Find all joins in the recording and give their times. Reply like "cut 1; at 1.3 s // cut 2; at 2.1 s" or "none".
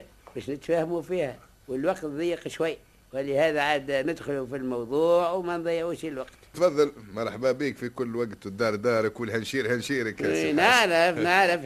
cut 1; at 6.5 s